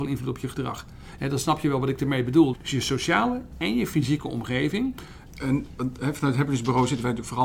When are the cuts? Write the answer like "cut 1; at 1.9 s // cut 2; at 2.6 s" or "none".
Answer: cut 1; at 1.2 s // cut 2; at 2.5 s // cut 3; at 5.3 s